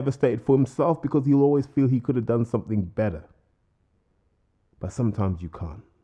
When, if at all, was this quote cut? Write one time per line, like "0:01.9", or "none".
none